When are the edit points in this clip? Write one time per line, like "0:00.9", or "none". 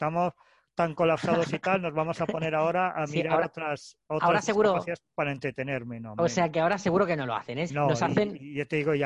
0:07.7